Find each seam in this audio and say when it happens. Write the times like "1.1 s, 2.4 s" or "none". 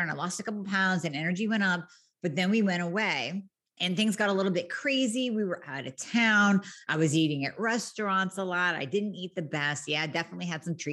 none